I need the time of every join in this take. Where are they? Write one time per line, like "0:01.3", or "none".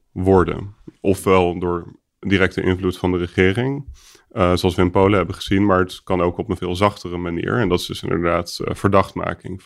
0:06.6